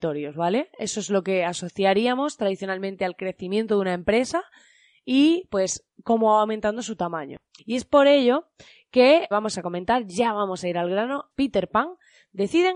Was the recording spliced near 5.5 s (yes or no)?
no